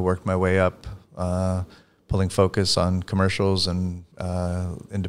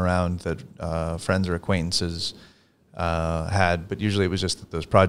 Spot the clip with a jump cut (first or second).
first